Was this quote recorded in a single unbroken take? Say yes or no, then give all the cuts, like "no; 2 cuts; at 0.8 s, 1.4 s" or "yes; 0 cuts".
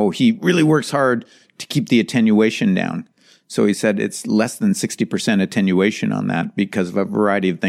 yes; 0 cuts